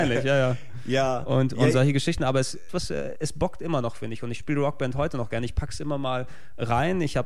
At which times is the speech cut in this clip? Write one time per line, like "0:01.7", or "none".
0:02.7